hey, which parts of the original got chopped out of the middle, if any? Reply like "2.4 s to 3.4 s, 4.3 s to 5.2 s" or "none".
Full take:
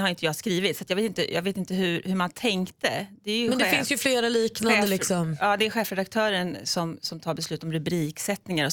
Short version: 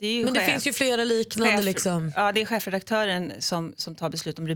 none